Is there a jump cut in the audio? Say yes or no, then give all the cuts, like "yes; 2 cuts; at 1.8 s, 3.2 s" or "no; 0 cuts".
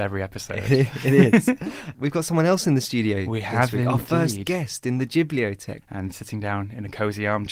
yes; 1 cut; at 5.8 s